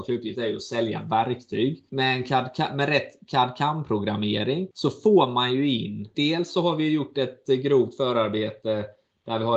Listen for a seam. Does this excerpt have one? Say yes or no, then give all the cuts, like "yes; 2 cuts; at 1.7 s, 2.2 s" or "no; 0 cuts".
no; 0 cuts